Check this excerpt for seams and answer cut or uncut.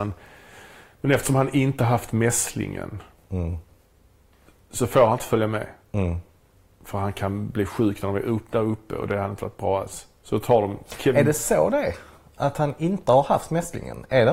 uncut